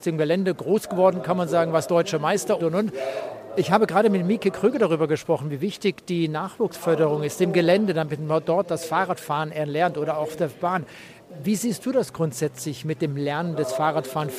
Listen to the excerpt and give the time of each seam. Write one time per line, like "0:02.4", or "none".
0:02.6